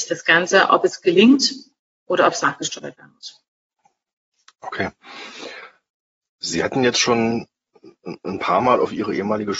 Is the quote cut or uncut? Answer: uncut